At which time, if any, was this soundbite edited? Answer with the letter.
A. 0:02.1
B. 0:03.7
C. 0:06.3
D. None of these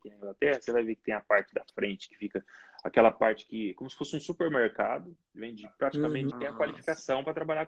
C